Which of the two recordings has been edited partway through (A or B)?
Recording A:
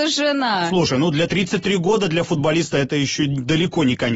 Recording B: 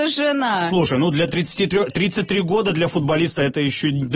A